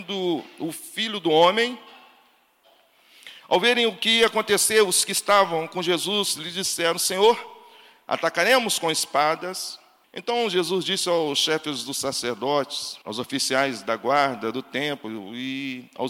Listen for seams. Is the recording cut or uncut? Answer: cut